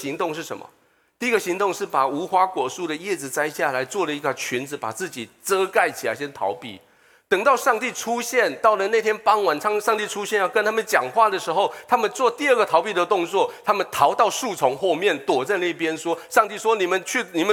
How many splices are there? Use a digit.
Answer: 0